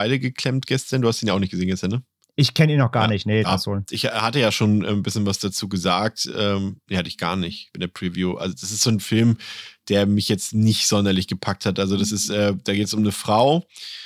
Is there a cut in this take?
yes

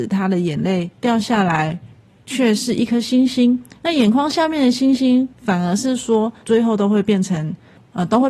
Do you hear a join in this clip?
yes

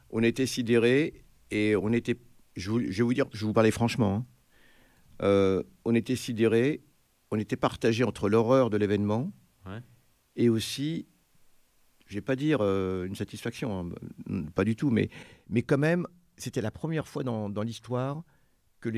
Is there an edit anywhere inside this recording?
no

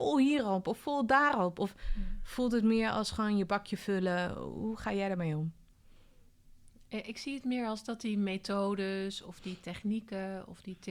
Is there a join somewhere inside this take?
no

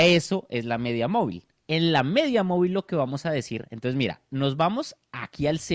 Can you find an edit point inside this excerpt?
no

